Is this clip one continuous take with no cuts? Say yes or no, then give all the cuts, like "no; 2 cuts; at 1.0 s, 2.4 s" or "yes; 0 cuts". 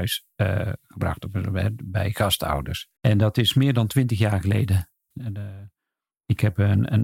no; 2 cuts; at 3.0 s, 5.1 s